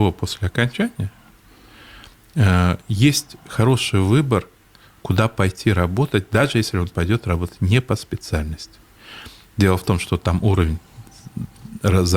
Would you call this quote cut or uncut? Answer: uncut